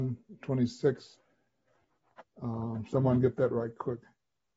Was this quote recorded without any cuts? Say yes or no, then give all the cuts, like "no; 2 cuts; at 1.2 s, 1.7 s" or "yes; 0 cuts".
yes; 0 cuts